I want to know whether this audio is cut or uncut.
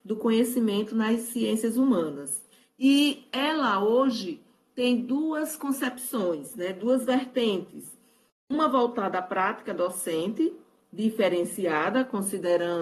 uncut